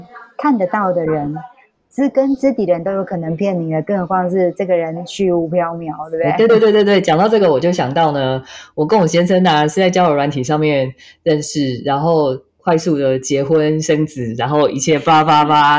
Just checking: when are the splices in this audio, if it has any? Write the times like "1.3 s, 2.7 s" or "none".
none